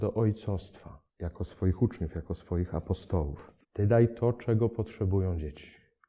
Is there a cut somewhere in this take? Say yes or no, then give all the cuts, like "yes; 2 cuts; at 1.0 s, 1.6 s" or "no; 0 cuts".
yes; 2 cuts; at 1.1 s, 3.6 s